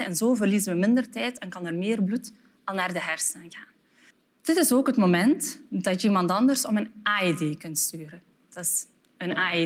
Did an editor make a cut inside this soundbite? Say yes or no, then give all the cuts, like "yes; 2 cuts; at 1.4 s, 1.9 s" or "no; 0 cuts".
no; 0 cuts